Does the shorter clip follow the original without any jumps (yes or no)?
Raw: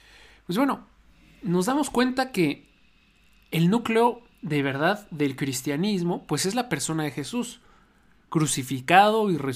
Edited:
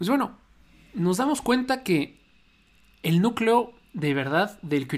yes